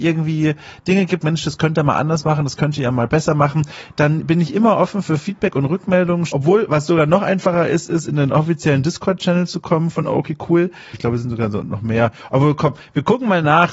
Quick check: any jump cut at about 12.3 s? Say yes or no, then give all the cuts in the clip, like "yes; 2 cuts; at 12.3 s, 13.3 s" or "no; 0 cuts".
no; 3 cuts; at 1.2 s, 6.3 s, 10.9 s